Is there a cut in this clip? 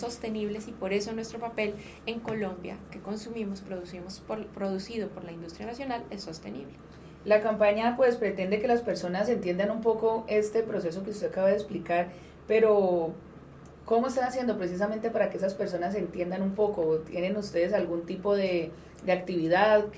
no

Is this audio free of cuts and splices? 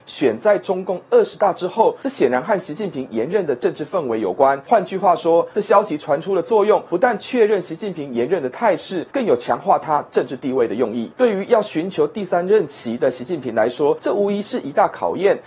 no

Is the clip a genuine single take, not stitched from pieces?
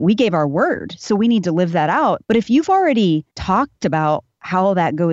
no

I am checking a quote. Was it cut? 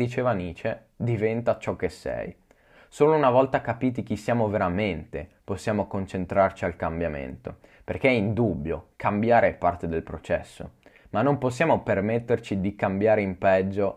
no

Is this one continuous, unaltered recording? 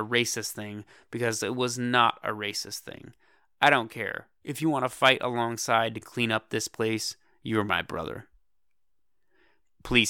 yes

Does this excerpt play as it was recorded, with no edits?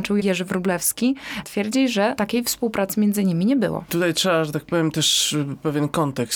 no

